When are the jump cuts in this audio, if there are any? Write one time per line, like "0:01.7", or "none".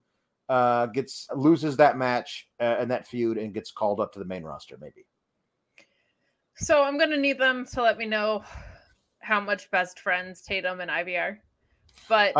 0:01.3